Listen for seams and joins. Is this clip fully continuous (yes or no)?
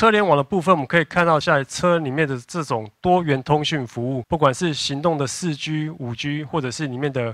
no